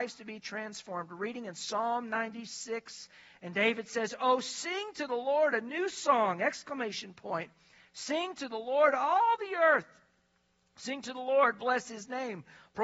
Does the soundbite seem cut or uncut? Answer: uncut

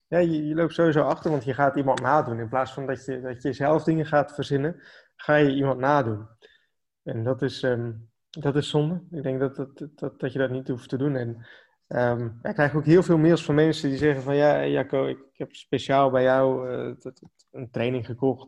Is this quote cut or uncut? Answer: uncut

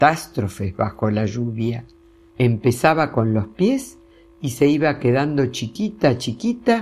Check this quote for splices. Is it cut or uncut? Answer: cut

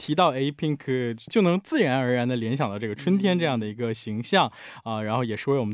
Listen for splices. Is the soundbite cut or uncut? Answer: uncut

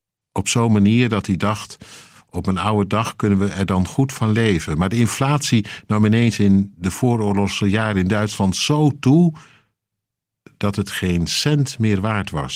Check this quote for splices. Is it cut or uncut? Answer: uncut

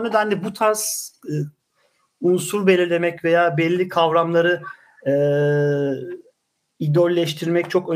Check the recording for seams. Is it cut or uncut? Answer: uncut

